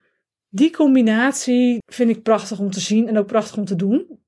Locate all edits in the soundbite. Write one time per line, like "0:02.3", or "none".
0:01.8

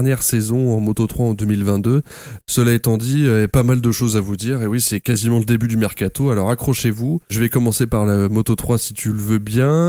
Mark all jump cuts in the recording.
0:02.4

